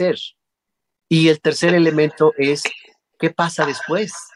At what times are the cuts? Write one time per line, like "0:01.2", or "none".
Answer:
0:01.0